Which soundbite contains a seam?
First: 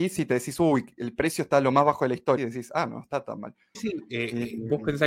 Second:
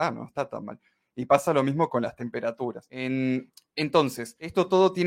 first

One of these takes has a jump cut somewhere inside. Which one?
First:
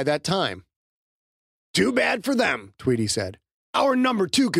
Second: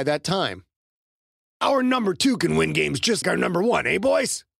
second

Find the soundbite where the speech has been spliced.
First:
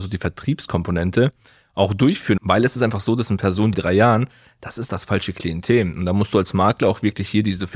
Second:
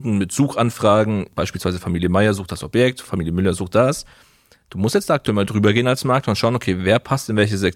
first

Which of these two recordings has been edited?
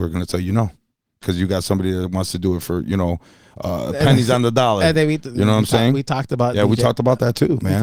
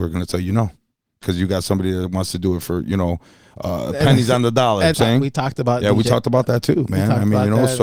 second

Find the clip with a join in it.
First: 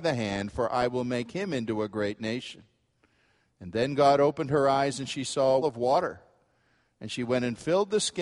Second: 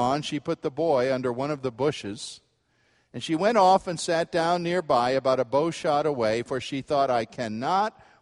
first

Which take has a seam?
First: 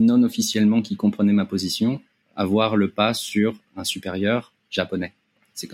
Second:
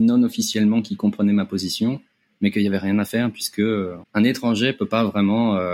first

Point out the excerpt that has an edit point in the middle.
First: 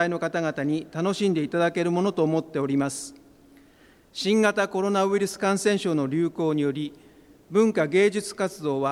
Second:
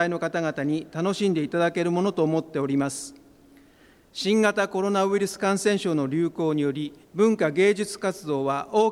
second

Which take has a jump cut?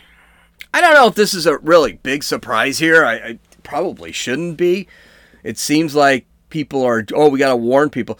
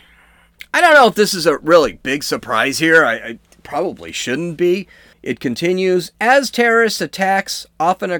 second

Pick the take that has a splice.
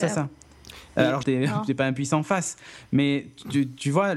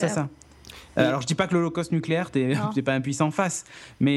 first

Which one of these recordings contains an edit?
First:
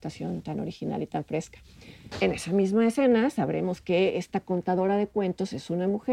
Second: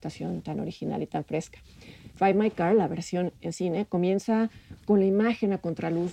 first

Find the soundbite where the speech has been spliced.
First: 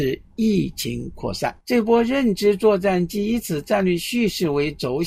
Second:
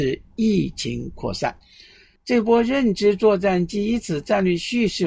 first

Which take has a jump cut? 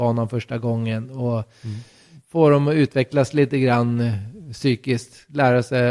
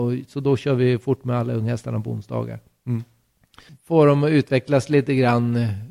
second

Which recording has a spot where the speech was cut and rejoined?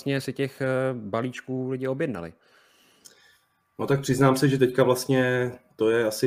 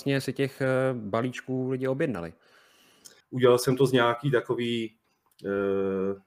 second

